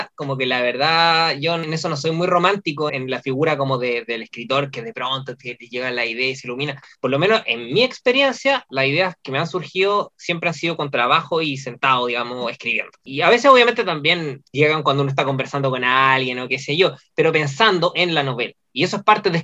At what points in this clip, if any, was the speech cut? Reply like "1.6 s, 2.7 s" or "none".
2.9 s